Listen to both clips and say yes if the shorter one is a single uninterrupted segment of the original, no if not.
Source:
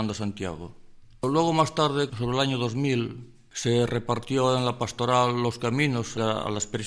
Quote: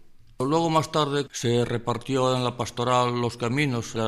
no